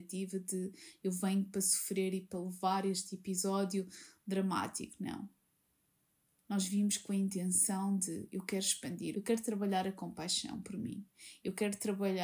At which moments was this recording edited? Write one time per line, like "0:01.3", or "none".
0:09.1